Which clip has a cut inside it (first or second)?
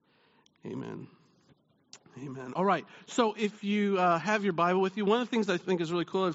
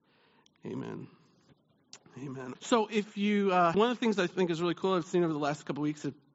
second